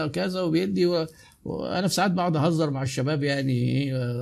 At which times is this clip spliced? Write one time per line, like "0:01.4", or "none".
none